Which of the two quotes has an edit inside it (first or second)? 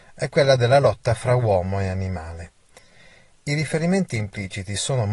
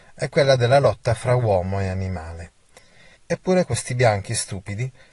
second